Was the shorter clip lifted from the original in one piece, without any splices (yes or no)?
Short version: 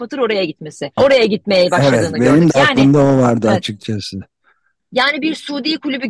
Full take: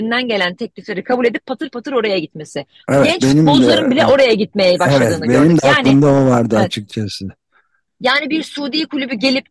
no